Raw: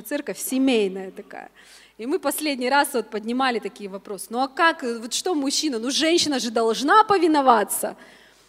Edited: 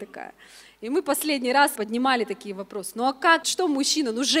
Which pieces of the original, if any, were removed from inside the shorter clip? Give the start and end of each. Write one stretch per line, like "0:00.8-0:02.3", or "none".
0:02.9-0:03.1
0:04.8-0:05.1